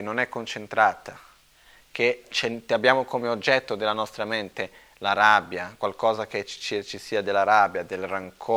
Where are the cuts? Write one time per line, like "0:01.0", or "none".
none

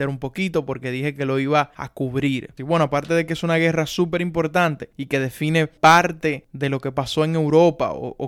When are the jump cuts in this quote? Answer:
0:02.6

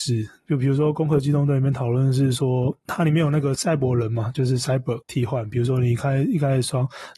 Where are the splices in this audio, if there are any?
0:05.0

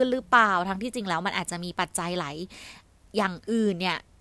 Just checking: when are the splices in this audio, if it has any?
none

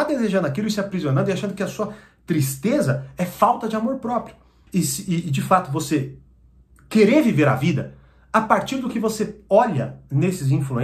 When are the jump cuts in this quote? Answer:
0:04.7

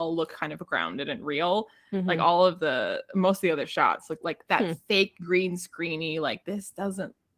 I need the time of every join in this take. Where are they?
0:04.2

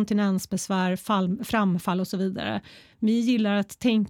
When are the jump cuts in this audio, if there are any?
none

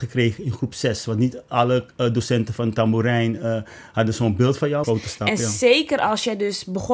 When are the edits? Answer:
0:04.8

